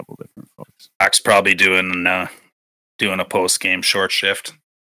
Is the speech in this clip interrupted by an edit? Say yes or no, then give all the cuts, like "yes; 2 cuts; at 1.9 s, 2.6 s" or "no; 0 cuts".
yes; 1 cut; at 1.0 s